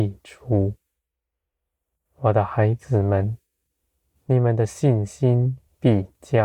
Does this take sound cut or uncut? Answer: uncut